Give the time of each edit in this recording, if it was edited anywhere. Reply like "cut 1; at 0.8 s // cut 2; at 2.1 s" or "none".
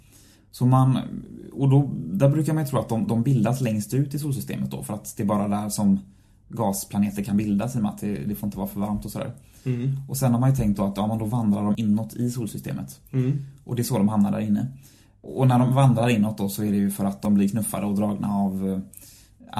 none